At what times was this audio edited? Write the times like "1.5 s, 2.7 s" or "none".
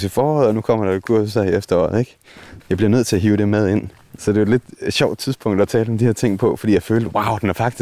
2.6 s, 4.2 s